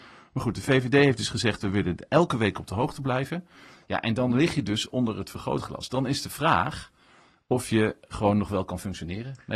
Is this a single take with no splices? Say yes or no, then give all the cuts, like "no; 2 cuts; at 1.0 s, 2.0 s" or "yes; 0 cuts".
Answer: yes; 0 cuts